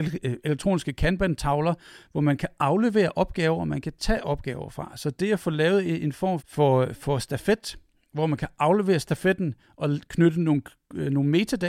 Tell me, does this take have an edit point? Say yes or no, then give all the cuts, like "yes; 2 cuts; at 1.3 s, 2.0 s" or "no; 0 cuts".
yes; 1 cut; at 6.4 s